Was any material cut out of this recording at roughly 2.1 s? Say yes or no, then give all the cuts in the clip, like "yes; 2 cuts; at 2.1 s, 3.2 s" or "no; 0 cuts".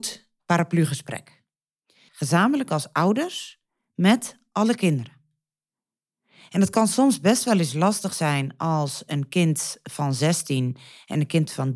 yes; 1 cut; at 2.1 s